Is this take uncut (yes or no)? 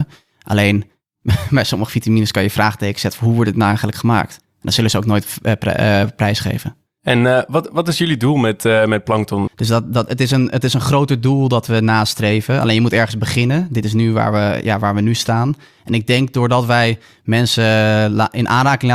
no